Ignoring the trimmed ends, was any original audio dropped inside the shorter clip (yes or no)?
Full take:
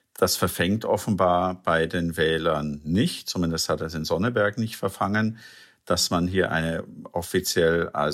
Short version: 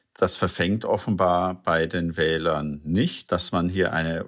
yes